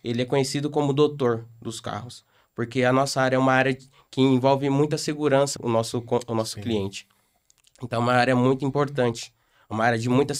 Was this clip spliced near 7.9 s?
no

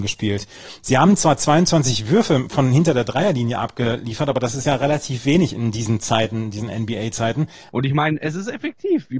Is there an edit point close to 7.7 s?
yes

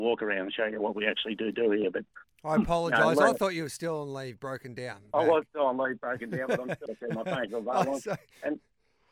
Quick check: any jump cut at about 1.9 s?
no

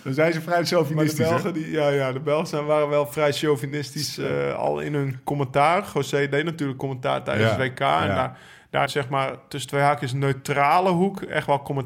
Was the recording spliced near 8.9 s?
yes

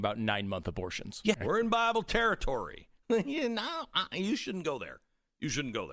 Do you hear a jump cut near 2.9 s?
no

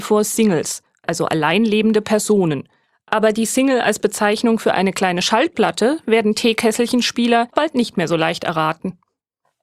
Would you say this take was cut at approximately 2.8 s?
no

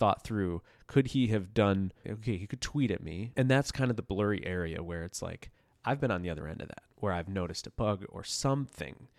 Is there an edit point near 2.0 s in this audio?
yes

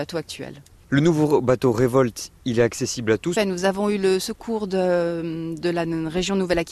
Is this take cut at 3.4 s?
yes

